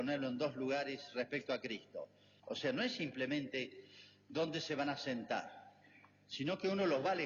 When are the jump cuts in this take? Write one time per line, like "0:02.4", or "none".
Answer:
0:02.4

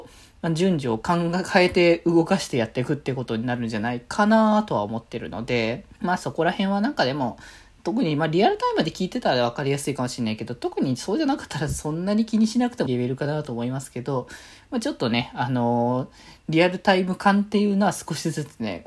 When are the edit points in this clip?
0:06.0
0:12.9

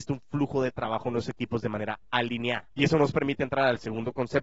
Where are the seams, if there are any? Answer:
0:02.7

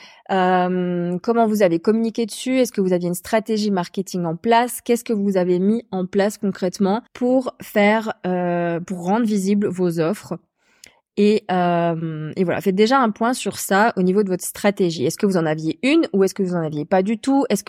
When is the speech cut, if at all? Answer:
0:07.1

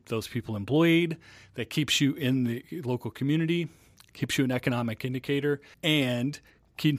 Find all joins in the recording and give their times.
0:05.7

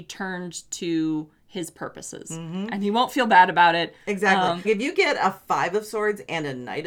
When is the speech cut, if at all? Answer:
0:04.6

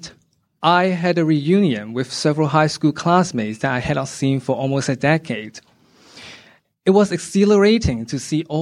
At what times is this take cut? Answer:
none

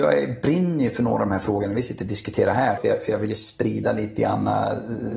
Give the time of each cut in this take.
0:02.8

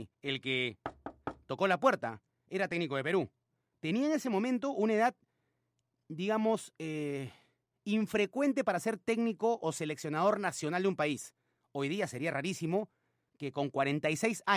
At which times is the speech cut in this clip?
none

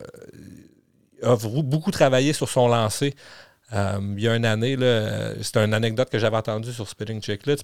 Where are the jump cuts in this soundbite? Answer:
none

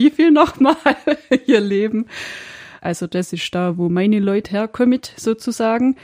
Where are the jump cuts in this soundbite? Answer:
0:02.8

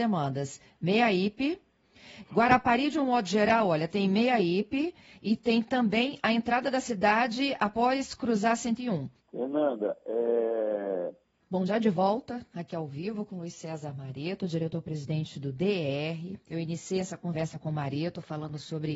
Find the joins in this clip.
0:09.2
0:11.3

